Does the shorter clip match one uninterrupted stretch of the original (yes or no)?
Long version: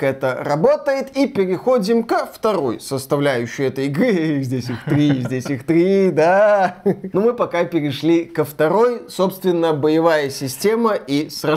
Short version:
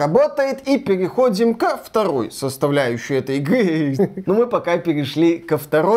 no